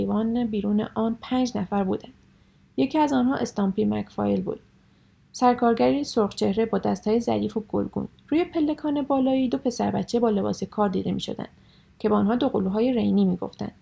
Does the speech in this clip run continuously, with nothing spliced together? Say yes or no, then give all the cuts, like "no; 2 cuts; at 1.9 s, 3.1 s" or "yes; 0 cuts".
yes; 0 cuts